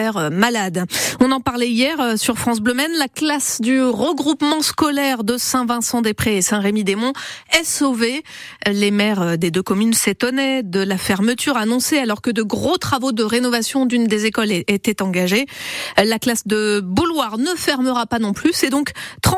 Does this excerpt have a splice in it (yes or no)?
no